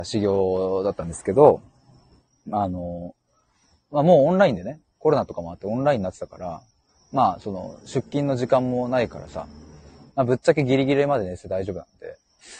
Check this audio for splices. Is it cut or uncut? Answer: uncut